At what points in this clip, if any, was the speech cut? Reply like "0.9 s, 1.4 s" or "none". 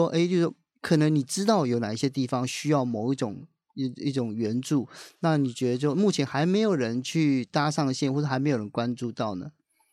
none